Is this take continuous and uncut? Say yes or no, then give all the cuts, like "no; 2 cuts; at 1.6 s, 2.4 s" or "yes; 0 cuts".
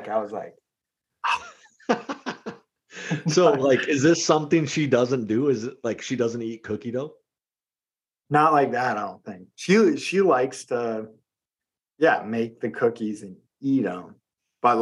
yes; 0 cuts